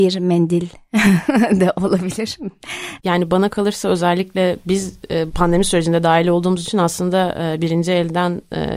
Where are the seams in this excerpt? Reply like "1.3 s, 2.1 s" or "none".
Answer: 3.0 s, 5.3 s